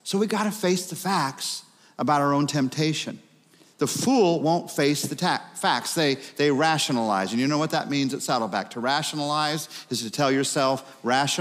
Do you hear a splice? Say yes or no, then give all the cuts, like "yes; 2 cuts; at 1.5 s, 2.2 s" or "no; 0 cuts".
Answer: no; 0 cuts